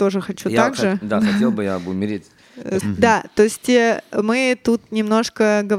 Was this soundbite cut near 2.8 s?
yes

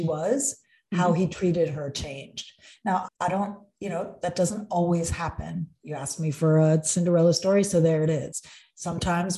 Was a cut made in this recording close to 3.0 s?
yes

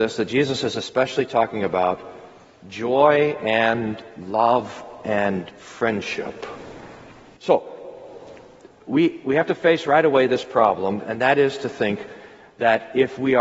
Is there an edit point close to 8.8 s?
no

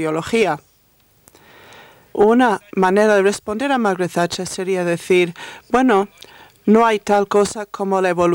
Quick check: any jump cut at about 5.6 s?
no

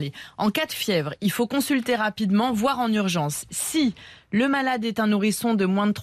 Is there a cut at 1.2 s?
no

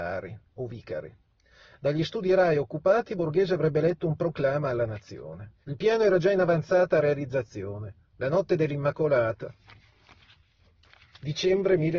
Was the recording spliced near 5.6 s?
yes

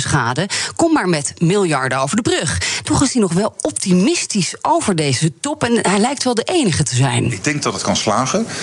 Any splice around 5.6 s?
no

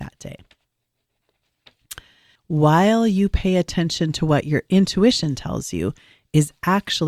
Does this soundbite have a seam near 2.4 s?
yes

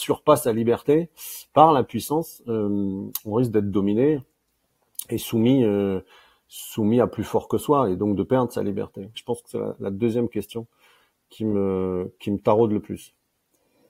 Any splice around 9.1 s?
yes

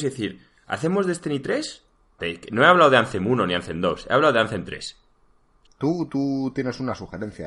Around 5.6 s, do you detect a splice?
yes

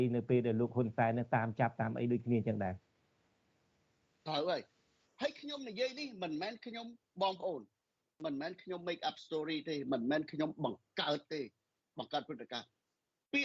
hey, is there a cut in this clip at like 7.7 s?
no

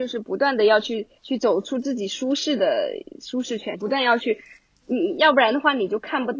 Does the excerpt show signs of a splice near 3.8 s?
yes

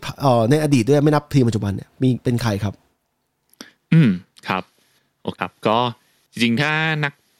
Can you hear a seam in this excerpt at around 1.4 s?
no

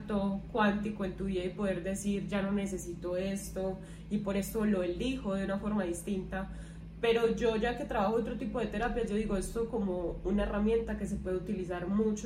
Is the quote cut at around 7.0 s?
no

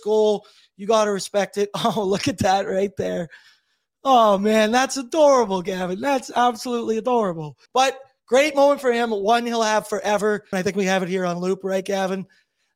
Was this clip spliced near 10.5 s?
yes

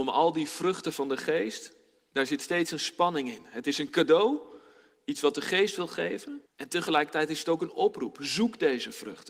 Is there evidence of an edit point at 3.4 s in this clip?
no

